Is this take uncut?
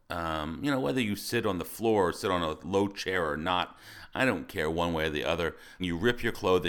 no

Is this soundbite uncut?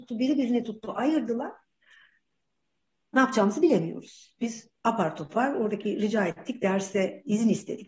no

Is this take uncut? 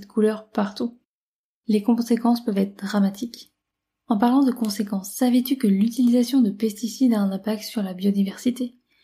yes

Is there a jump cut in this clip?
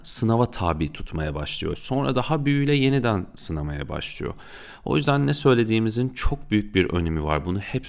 yes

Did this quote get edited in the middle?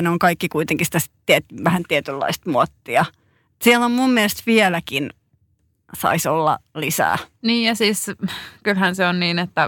no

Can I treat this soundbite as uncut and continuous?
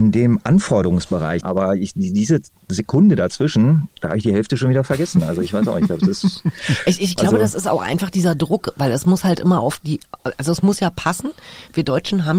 no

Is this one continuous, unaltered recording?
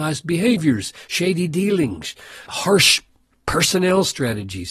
no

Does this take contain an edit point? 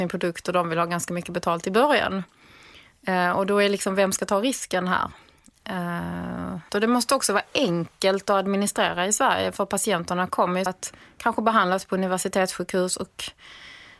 yes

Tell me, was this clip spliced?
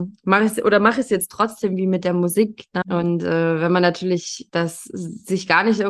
yes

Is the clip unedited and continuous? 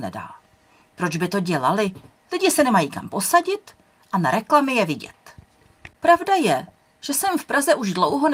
no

